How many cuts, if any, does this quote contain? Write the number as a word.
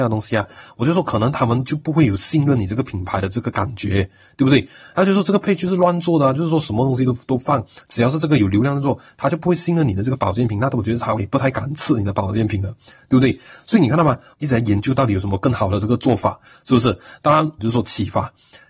two